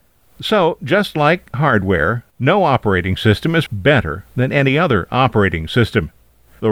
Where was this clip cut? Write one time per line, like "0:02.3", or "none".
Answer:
0:02.3
0:03.7